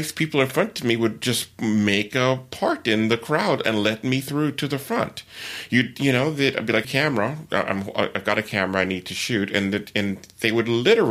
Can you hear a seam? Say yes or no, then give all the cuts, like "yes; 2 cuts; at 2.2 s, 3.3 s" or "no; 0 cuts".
yes; 1 cut; at 6.8 s